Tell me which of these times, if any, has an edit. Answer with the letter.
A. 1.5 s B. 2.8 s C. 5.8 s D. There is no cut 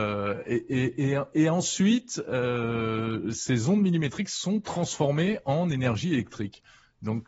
D